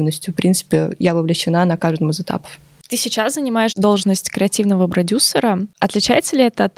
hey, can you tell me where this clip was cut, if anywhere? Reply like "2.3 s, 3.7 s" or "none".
none